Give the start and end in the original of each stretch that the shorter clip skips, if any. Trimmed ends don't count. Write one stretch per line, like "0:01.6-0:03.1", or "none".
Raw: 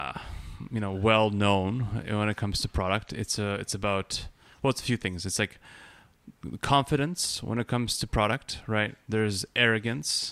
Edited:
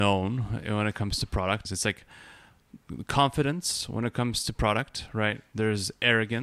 0:03.1-0:05.2